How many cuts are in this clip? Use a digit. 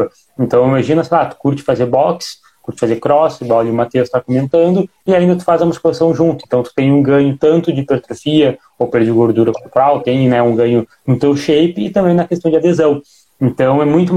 0